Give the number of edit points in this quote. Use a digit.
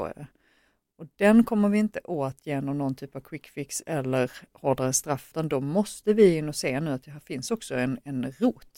0